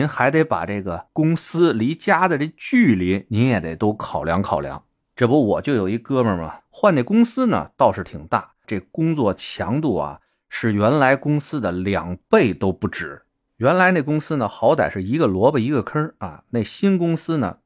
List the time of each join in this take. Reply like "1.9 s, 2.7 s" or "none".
6.6 s, 8.6 s